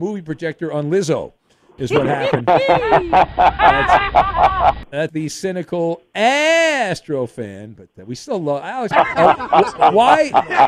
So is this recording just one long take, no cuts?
no; 2 cuts; at 5.1 s, 8.9 s

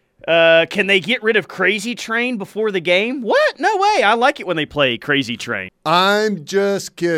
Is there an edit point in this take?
yes; 1 cut; at 5.7 s

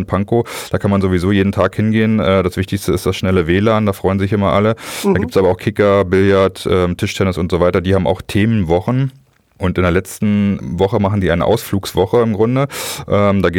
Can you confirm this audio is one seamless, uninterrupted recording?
yes; 0 cuts

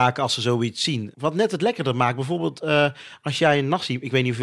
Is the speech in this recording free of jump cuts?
no; 1 cut; at 1.1 s

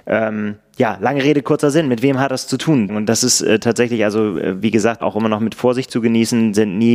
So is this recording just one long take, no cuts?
no; 2 cuts; at 2.9 s, 5.0 s

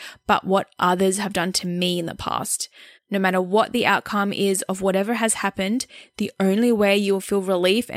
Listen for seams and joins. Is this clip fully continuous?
no; 1 cut; at 3.0 s

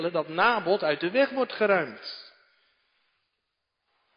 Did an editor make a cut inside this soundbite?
no; 0 cuts

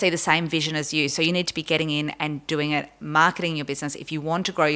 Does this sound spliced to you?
no; 0 cuts

